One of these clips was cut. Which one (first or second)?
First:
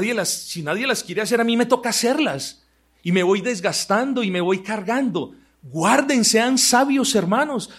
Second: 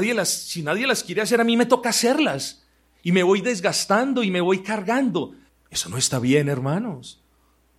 second